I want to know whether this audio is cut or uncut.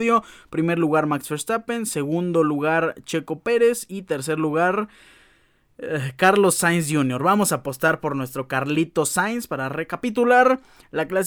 uncut